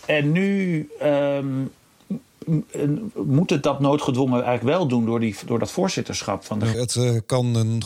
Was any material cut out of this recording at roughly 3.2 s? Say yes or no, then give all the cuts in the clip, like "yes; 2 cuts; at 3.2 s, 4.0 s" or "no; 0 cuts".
no; 1 cut; at 6.7 s